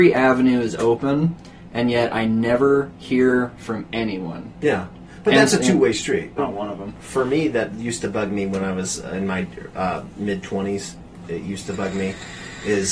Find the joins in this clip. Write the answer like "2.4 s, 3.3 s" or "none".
6.4 s